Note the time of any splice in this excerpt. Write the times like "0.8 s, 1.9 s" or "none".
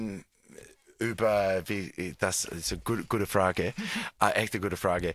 none